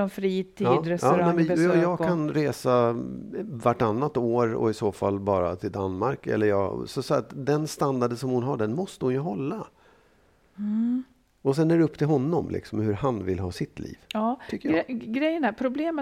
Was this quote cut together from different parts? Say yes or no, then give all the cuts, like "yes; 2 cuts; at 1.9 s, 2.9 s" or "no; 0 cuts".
no; 0 cuts